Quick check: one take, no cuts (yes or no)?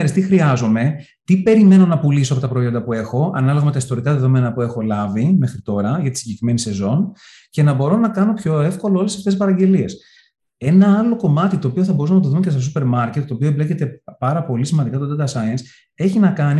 yes